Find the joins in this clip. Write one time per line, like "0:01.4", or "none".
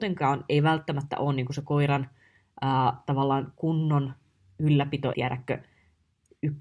0:05.1